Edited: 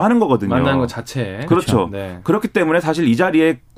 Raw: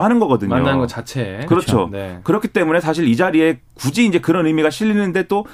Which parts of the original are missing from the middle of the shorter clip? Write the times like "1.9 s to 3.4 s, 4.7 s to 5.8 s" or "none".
none